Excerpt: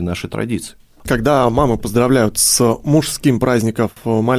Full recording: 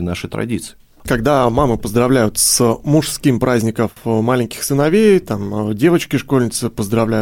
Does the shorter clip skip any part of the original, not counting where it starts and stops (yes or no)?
no